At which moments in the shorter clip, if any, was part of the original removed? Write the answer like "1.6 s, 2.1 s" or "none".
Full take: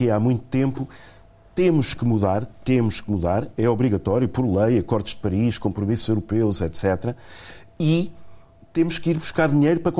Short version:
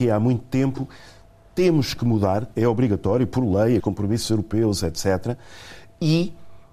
2.5 s, 3.8 s